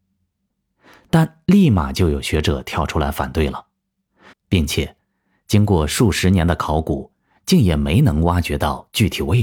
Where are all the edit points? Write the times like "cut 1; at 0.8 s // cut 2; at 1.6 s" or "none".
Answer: cut 1; at 4.3 s